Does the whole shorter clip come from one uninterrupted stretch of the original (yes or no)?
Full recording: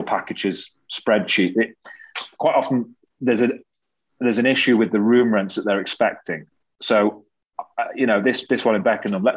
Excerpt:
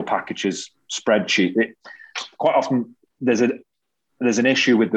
yes